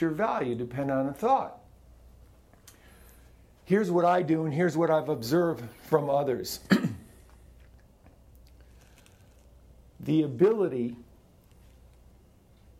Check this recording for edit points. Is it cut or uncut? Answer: uncut